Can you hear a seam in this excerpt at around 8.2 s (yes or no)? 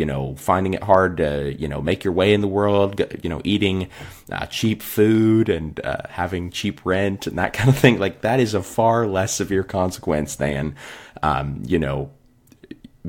no